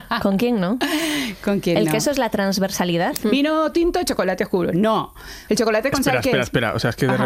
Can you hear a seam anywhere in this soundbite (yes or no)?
yes